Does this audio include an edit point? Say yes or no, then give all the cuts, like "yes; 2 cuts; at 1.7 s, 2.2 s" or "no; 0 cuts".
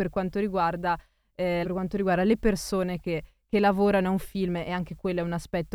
yes; 1 cut; at 1.6 s